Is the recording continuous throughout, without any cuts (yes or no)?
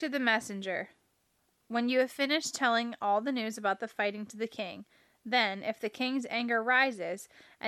yes